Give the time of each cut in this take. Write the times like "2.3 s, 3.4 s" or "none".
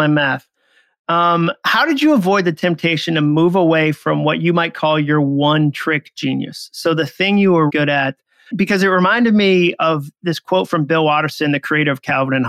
7.7 s